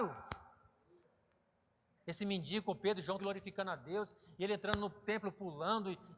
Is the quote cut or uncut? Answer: cut